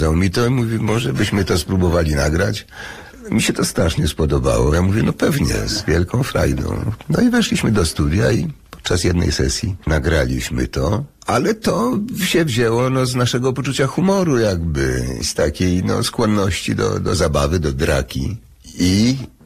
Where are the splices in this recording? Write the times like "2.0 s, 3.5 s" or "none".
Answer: none